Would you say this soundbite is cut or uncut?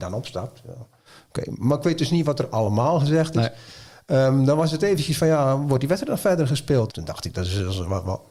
cut